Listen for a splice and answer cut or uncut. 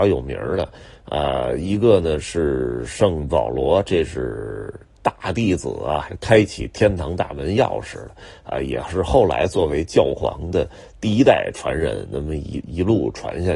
cut